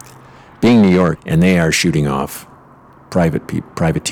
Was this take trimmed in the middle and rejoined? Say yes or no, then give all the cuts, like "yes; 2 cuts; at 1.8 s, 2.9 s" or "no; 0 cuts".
yes; 1 cut; at 1.2 s